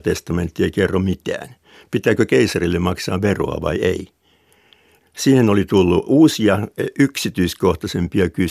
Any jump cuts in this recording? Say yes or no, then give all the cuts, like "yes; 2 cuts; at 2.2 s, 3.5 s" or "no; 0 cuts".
yes; 1 cut; at 5.0 s